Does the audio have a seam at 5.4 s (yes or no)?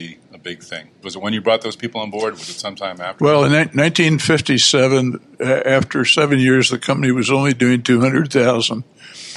no